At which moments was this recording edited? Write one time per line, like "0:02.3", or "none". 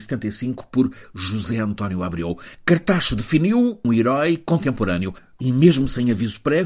0:03.8
0:05.3